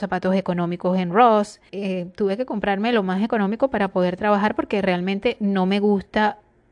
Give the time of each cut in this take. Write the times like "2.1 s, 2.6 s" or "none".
1.7 s